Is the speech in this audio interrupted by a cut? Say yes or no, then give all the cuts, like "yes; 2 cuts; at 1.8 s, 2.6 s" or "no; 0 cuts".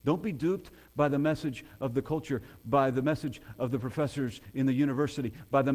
no; 0 cuts